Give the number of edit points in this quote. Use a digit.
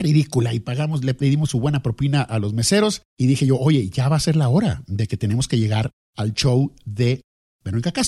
0